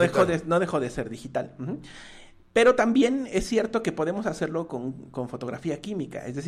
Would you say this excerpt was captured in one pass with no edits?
yes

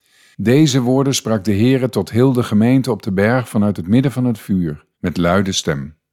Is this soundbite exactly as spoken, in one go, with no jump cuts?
no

